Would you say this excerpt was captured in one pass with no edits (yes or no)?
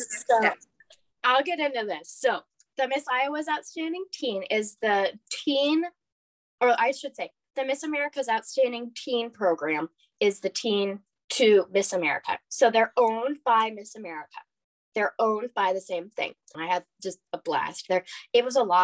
no